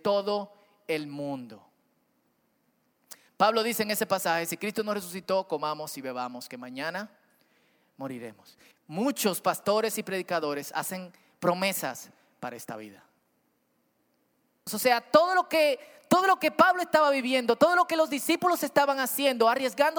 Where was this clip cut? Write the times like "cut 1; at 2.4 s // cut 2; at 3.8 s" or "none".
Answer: cut 1; at 8.7 s // cut 2; at 14.7 s